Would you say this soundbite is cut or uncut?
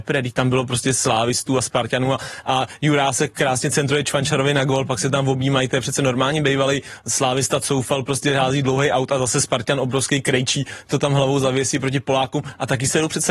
uncut